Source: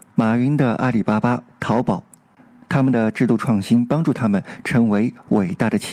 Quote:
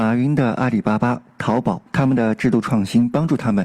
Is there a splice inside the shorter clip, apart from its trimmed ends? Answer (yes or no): yes